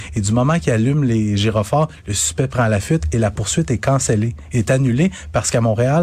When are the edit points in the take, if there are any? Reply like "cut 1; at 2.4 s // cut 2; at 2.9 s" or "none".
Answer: none